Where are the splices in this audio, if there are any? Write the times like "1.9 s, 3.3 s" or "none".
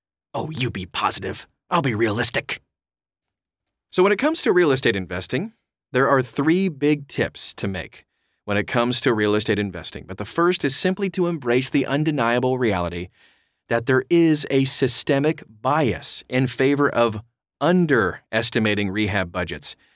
none